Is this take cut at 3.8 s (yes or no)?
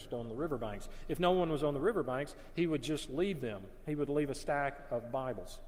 no